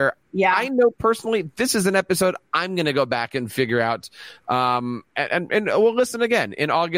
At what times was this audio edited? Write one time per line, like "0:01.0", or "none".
none

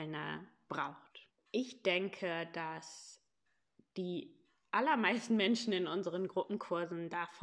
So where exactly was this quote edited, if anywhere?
0:01.3

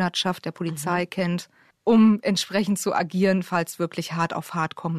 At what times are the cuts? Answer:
0:01.7

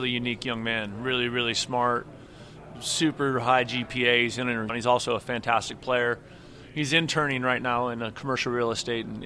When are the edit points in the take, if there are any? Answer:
0:04.7

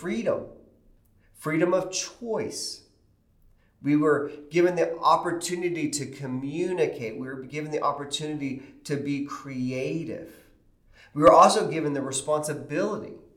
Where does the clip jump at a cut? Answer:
none

